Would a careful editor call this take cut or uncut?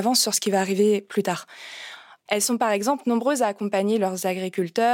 cut